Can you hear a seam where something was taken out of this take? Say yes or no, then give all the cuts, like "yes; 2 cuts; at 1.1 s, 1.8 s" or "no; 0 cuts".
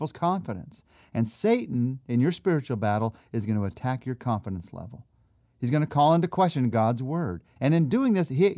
yes; 2 cuts; at 5.4 s, 7.6 s